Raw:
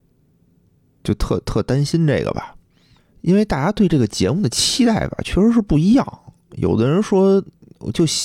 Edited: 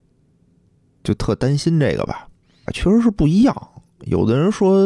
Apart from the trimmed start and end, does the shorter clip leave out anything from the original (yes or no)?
yes